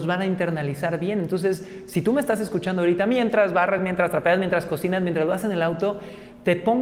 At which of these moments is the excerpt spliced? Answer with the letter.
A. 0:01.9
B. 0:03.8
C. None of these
C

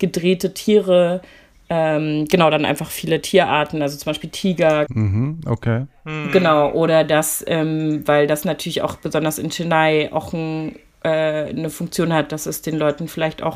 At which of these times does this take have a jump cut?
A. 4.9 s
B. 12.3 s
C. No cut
A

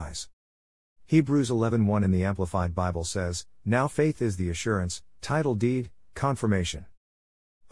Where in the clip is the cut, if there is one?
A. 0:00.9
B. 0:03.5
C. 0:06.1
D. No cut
D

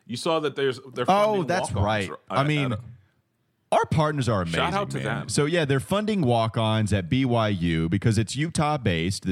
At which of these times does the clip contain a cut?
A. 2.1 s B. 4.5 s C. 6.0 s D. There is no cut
D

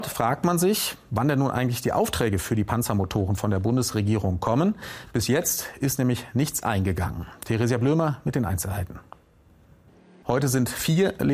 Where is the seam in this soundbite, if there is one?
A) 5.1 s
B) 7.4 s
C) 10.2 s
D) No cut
C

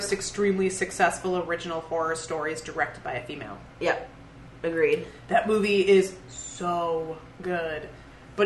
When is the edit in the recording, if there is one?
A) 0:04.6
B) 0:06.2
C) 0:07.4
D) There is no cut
D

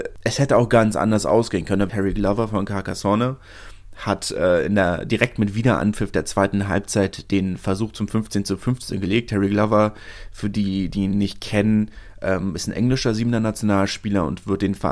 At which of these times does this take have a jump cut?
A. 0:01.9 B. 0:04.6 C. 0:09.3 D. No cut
A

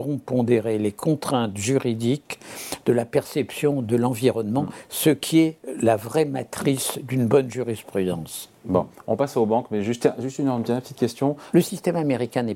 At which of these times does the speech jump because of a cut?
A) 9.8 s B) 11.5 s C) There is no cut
B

